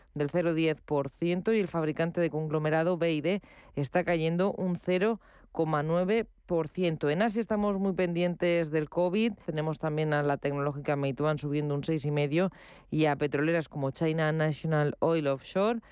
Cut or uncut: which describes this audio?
cut